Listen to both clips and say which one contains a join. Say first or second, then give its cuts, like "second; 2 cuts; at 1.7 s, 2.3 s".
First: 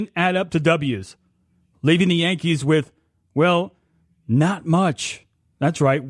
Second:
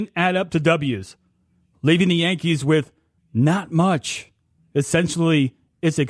second; 2 cuts; at 3.2 s, 4.6 s